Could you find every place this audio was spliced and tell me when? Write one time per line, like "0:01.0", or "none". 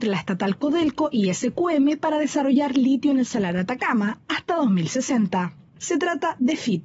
0:05.8